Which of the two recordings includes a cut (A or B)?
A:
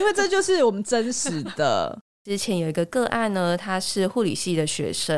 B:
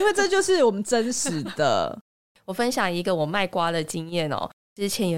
A